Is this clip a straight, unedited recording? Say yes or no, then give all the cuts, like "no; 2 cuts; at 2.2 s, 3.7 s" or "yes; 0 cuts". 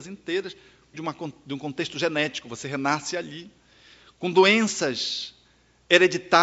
no; 1 cut; at 0.9 s